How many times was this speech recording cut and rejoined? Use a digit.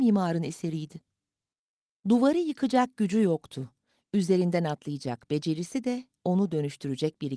0